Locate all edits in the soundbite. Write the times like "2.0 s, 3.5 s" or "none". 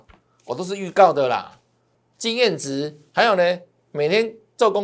1.9 s